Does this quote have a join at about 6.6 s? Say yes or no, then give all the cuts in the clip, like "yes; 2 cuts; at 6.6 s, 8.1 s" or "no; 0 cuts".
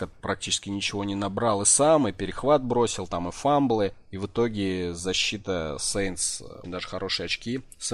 yes; 1 cut; at 6.6 s